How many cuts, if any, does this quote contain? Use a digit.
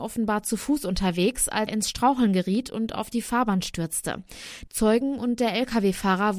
2